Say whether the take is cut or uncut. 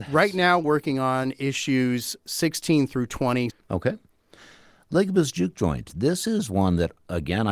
cut